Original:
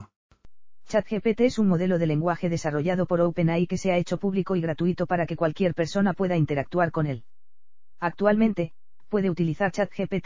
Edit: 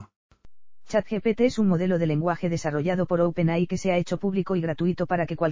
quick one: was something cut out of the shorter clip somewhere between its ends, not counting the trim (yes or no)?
no